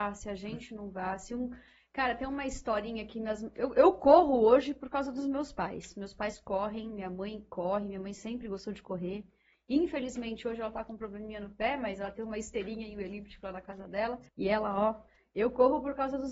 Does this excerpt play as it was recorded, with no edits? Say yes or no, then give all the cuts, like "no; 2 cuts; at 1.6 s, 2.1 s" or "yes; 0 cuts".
no; 1 cut; at 14.3 s